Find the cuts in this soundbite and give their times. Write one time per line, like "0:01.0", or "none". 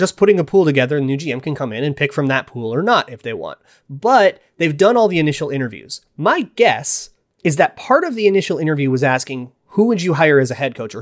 none